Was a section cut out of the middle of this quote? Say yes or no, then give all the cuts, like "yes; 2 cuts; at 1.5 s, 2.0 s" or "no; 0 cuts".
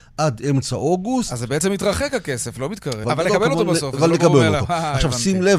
yes; 1 cut; at 3.0 s